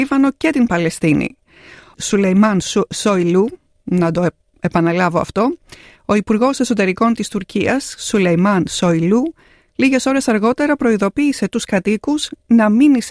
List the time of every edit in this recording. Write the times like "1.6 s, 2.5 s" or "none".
1.9 s